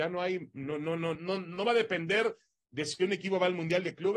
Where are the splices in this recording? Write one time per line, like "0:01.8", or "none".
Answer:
0:01.2